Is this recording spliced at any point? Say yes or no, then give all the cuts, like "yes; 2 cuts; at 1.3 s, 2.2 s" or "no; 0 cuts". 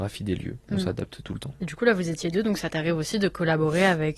no; 0 cuts